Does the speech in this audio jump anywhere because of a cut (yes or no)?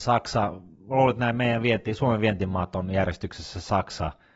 no